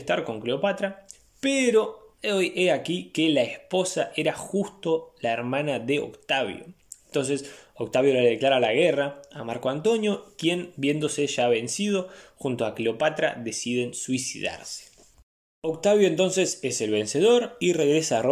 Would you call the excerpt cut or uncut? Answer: uncut